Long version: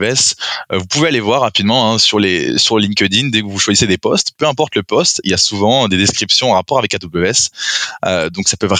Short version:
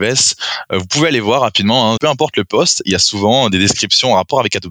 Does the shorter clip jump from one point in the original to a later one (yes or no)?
yes